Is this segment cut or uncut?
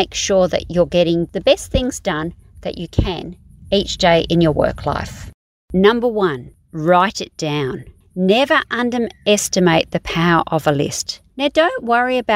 cut